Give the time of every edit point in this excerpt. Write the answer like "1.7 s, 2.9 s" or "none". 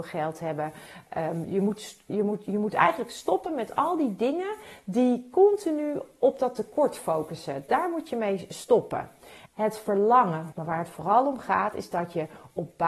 9.5 s, 10.5 s